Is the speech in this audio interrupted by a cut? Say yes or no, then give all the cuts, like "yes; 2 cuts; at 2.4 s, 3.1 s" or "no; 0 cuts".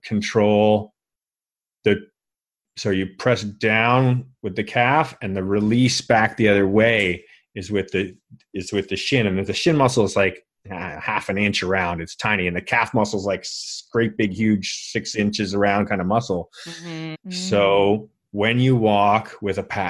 yes; 1 cut; at 17.1 s